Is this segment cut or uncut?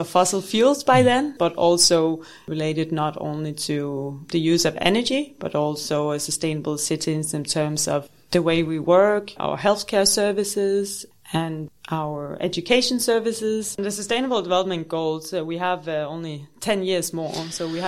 cut